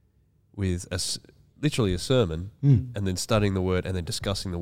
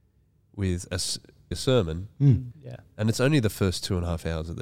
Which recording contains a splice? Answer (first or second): second